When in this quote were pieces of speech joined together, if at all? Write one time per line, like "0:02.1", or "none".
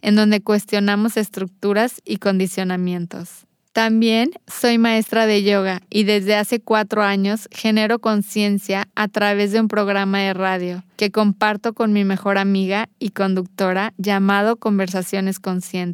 0:03.6

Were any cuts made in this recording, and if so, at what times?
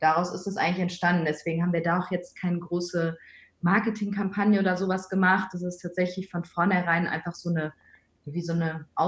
none

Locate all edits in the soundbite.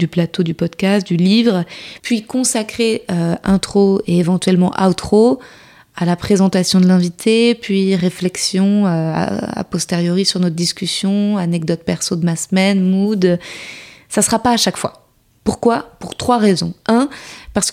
none

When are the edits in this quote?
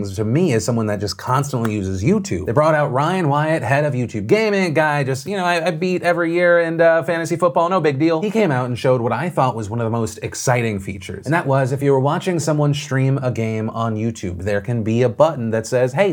none

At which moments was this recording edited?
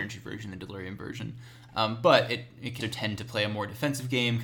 0:01.7
0:02.8

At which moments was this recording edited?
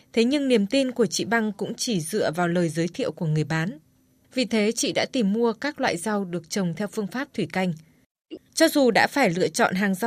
0:04.2
0:08.4

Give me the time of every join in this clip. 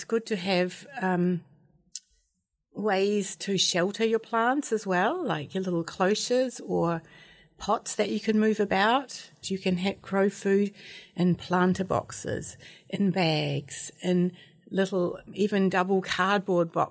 0:09.4
0:15.3

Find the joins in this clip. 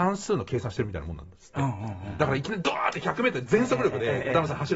none

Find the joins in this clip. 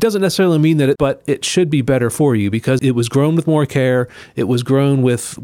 0:01.0
0:02.8

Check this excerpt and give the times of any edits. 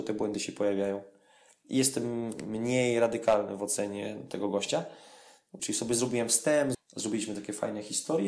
0:05.6
0:06.7

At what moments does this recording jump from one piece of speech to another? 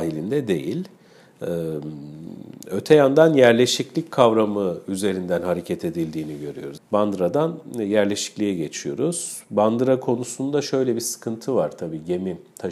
0:06.8

